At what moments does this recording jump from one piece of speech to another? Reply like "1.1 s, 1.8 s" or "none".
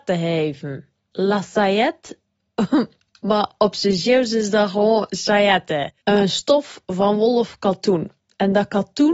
1.1 s, 6.0 s